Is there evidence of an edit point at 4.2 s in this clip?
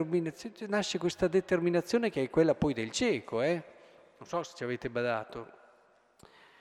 no; 0 cuts

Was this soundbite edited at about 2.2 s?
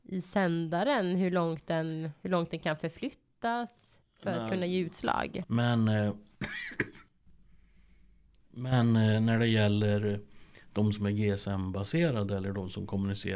no; 1 cut; at 5.4 s

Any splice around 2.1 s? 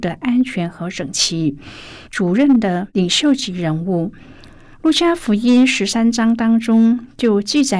yes; 1 cut; at 2.1 s

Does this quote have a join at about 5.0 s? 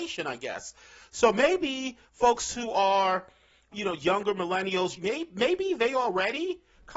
yes; 1 cut; at 5.0 s

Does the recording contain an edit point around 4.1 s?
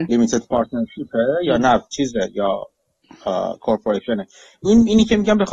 no; 1 cut; at 1.9 s

